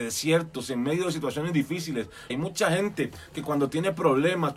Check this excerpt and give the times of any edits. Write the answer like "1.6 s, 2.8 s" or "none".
2.3 s